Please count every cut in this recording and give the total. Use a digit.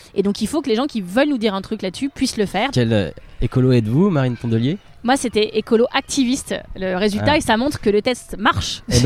1